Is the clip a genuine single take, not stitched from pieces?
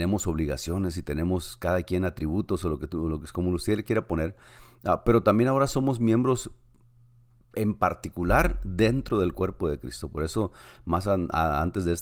yes; 0 cuts

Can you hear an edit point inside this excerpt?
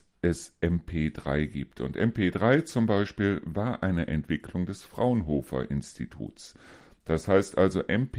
no; 0 cuts

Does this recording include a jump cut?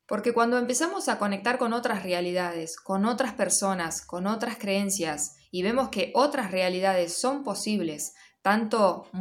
no; 0 cuts

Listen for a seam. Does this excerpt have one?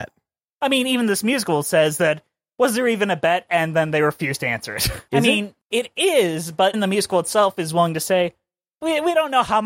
yes; 2 cuts; at 5.1 s, 6.7 s

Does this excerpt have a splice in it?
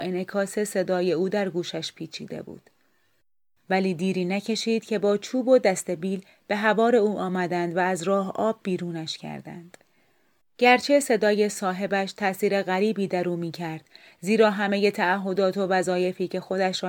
yes; 2 cuts; at 3.6 s, 10.4 s

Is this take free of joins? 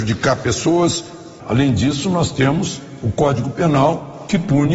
no; 1 cut; at 1.4 s

